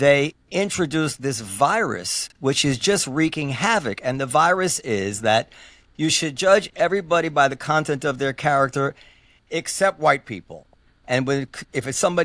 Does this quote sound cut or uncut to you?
uncut